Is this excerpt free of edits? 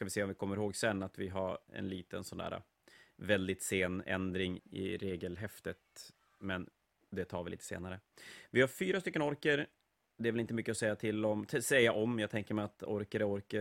no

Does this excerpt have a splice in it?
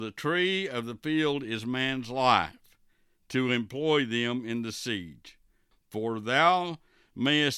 yes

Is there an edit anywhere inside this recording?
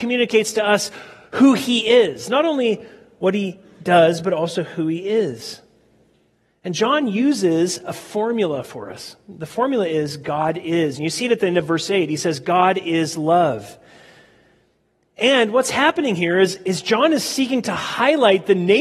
no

